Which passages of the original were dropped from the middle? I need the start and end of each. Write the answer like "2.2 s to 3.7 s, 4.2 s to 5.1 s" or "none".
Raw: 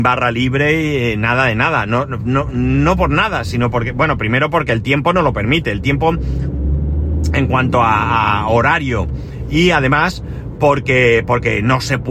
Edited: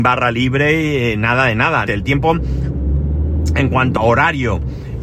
1.9 s to 5.6 s, 7.7 s to 8.4 s